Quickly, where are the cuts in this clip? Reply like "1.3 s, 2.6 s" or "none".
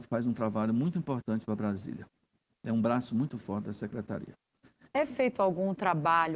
4.9 s